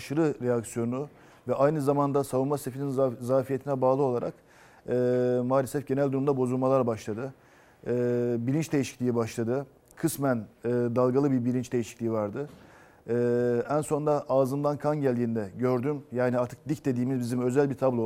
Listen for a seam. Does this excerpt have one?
no; 0 cuts

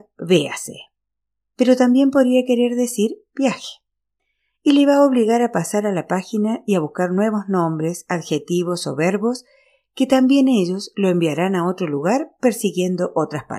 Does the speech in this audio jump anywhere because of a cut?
no; 0 cuts

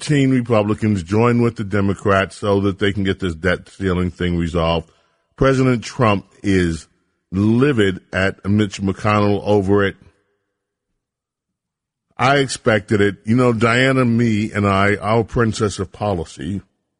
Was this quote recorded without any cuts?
yes; 0 cuts

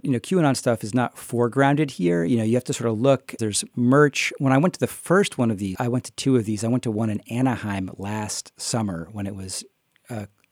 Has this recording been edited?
yes; 2 cuts; at 3.4 s, 5.7 s

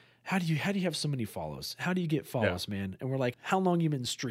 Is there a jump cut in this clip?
yes; 1 cut; at 3.3 s

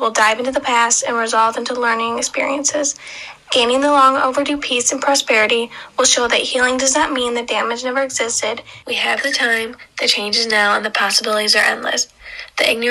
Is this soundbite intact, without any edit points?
no; 1 cut; at 8.8 s

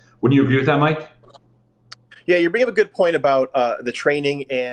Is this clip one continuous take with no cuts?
yes; 0 cuts

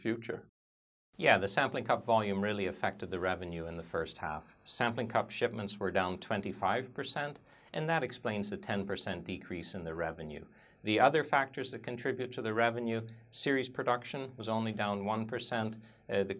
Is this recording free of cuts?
yes; 0 cuts

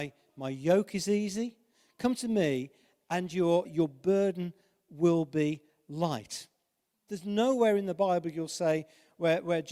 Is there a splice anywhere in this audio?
yes; 2 cuts; at 3.7 s, 7.1 s

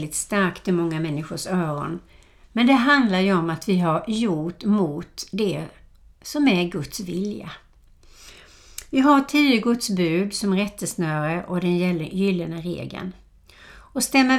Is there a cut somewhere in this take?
no; 0 cuts

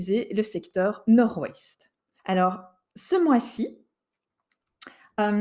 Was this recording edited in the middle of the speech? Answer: yes; 1 cut; at 2.2 s

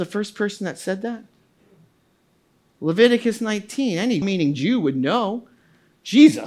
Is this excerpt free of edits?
no; 1 cut; at 4.2 s

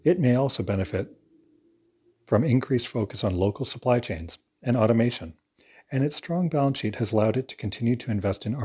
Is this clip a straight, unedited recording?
yes; 0 cuts

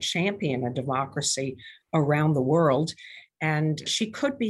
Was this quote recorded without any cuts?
yes; 0 cuts

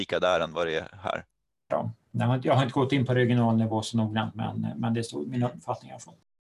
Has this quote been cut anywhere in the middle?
yes; 1 cut; at 1.7 s

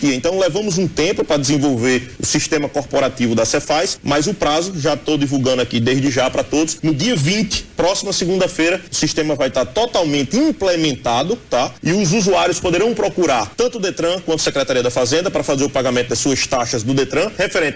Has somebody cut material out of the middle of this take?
no; 0 cuts

